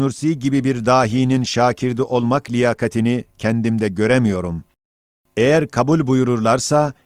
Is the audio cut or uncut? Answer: uncut